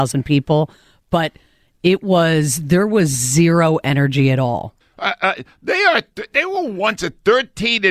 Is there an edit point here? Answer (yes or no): yes